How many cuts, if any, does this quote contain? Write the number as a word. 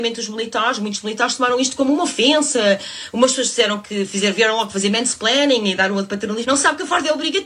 one